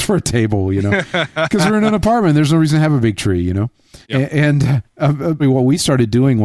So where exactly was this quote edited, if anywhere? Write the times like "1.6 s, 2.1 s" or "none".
4.0 s, 5.4 s

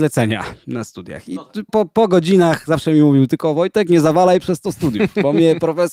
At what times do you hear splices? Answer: 1.7 s

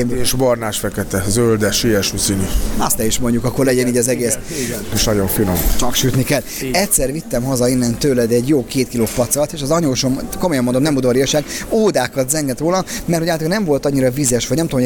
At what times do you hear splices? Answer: 4.9 s

